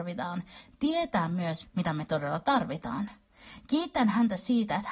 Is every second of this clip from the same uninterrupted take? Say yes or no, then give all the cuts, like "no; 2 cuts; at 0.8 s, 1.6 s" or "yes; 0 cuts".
no; 1 cut; at 1.6 s